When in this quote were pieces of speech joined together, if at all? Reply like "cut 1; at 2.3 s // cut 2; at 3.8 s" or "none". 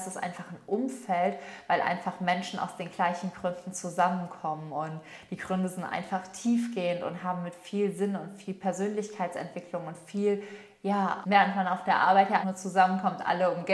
cut 1; at 1.7 s // cut 2; at 11.2 s // cut 3; at 12.4 s